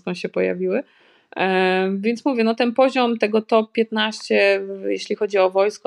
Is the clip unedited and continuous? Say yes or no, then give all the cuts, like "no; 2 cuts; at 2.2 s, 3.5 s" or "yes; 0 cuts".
yes; 0 cuts